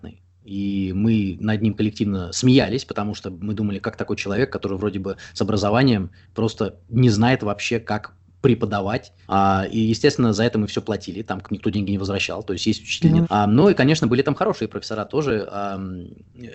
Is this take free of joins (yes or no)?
no